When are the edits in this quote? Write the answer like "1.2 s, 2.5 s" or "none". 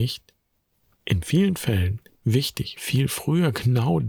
2.8 s